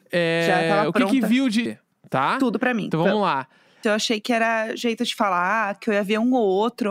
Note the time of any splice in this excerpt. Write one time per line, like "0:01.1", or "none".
0:01.7
0:03.8